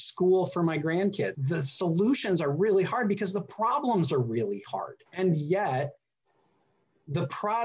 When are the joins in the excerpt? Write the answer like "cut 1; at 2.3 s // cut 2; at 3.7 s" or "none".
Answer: cut 1; at 1.3 s // cut 2; at 5.1 s